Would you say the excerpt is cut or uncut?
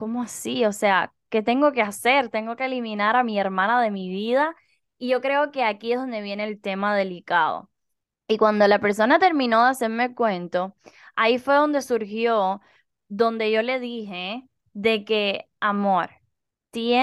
cut